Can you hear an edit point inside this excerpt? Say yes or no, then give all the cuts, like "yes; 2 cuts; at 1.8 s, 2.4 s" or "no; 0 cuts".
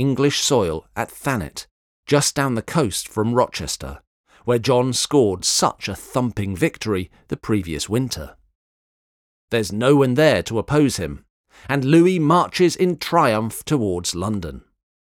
no; 0 cuts